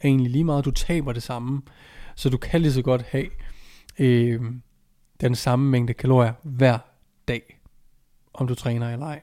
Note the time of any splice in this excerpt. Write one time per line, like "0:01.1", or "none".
none